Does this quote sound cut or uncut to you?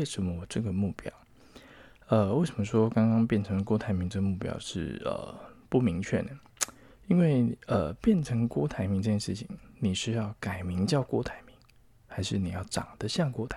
uncut